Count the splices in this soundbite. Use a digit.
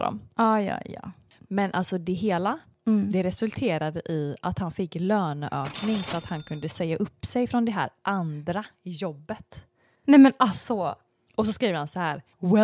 0